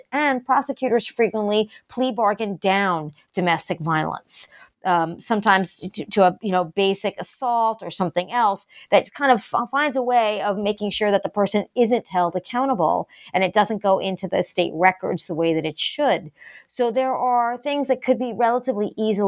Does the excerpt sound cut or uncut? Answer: uncut